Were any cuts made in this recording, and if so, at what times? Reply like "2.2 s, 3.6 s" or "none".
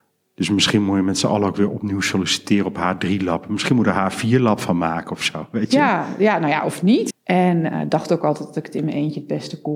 7.1 s